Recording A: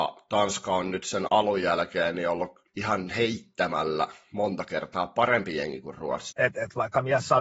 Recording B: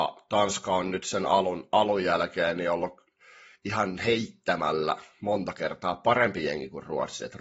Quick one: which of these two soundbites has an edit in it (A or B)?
A